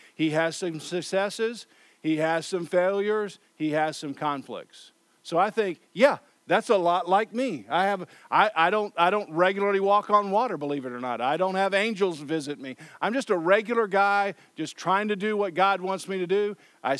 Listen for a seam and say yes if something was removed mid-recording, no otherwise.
no